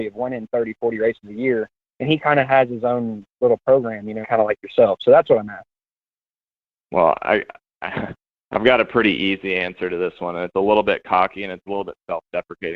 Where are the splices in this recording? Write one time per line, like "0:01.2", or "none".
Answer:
0:04.2